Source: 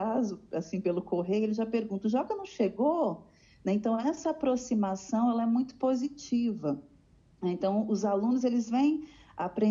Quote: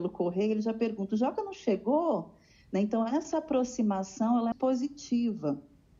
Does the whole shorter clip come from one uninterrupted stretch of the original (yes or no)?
no